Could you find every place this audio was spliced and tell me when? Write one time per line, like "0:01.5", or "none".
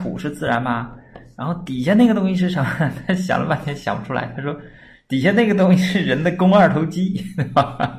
none